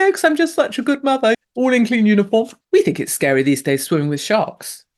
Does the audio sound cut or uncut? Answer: cut